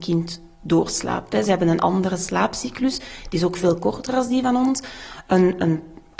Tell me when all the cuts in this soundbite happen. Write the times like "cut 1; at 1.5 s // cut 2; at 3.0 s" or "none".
none